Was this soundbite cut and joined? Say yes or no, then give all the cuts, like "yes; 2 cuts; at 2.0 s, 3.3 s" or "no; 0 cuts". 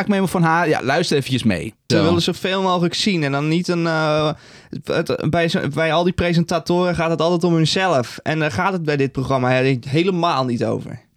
yes; 1 cut; at 1.9 s